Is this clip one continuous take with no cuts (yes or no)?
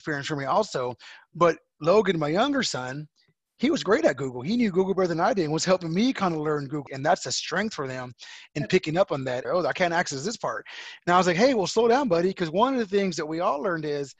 no